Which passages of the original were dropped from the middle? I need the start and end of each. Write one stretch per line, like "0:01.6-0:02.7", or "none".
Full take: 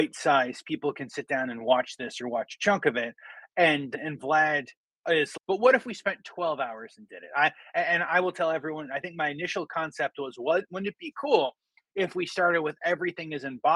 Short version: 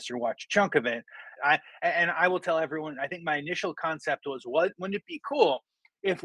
0:03.5-0:07.3